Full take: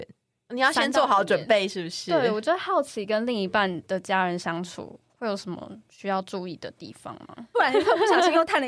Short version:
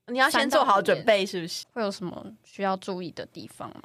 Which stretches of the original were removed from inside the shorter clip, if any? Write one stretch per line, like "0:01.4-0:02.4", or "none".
0:02.0-0:05.1